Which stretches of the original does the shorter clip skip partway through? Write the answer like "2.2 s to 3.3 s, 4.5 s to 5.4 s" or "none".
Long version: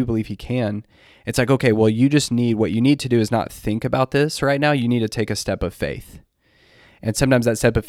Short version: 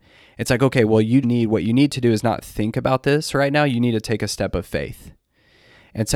2.1 s to 2.3 s